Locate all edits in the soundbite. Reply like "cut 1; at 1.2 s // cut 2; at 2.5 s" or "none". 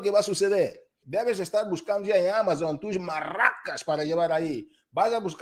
cut 1; at 1.0 s